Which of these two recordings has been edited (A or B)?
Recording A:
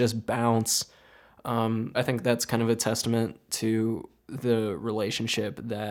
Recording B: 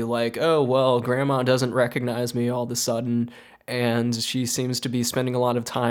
A